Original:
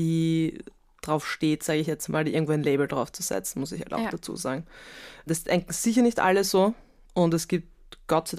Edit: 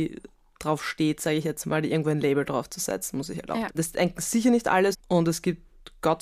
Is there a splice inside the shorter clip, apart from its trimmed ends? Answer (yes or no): yes